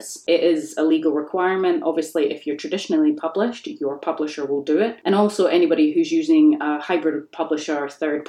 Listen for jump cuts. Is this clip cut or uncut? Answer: uncut